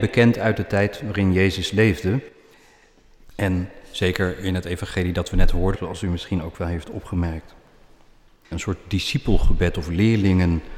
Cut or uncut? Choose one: cut